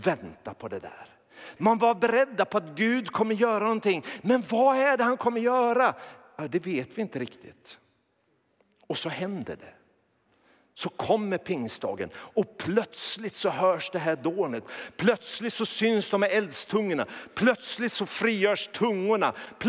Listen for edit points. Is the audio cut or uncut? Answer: cut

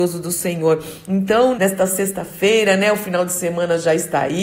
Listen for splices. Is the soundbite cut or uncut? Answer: cut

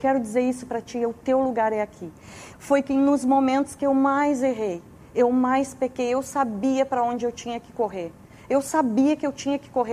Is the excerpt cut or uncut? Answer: cut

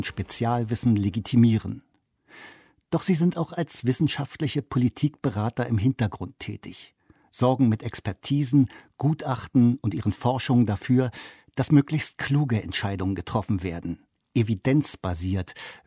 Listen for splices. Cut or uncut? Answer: uncut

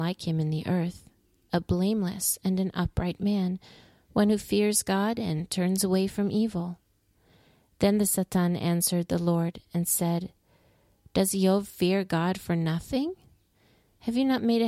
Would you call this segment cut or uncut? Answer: uncut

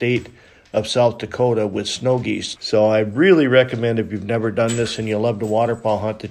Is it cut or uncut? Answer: cut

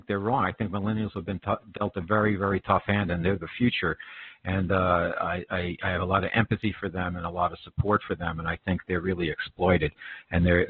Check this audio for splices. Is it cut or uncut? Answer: uncut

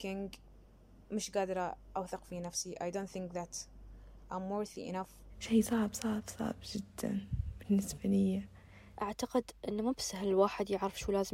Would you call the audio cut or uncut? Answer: uncut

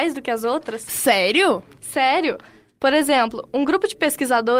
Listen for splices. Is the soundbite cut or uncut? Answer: uncut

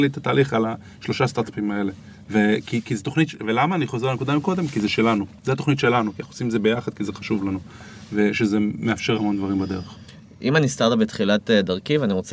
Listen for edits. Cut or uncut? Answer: cut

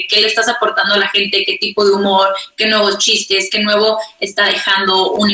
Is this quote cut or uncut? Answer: uncut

